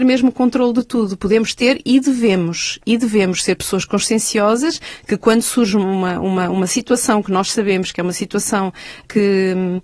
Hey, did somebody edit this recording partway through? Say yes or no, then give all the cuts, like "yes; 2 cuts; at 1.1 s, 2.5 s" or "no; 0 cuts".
no; 0 cuts